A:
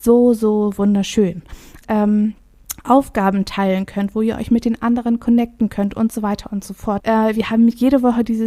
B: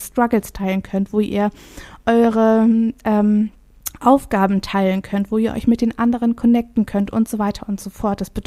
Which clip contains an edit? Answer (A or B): A